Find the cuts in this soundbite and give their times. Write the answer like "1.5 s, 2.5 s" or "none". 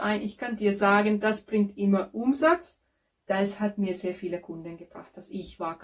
3.1 s